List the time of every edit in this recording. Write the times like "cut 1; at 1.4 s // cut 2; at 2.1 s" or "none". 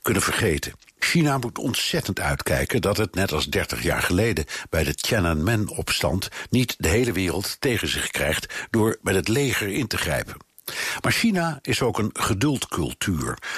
cut 1; at 1.0 s